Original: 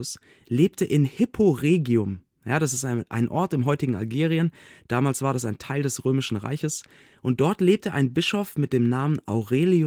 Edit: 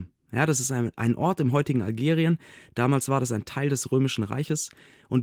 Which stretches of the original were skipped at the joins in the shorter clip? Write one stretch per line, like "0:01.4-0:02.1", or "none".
none

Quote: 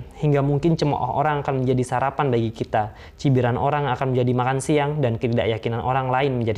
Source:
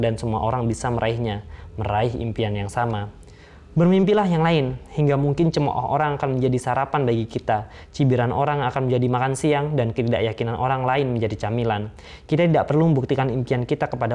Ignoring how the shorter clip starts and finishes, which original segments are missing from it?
none

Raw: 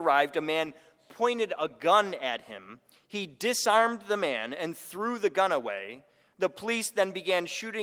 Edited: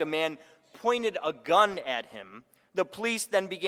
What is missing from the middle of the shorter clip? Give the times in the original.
0:02.9-0:06.2

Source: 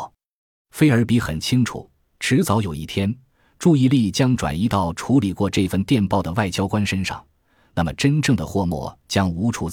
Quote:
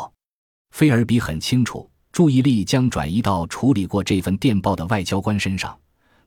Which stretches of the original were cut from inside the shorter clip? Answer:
0:02.1-0:03.6

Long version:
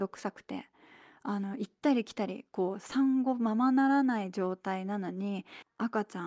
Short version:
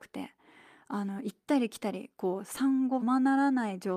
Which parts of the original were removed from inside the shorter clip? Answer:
0:03.4-0:03.5

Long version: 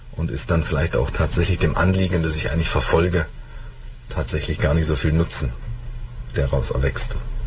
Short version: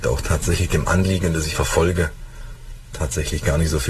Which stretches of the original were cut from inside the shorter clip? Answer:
0:02.4-0:02.7

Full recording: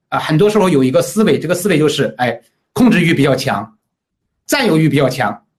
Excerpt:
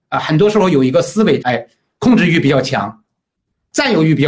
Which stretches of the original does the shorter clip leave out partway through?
0:01.4-0:02.2

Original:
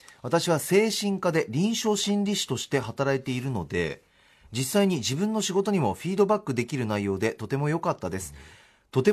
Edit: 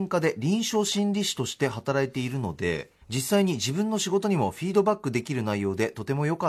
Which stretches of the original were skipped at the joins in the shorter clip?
0:04.1-0:04.4

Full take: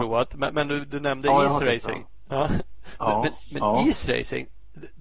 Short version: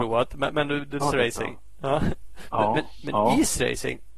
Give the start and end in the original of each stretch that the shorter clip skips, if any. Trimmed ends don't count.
0:01.0-0:01.5

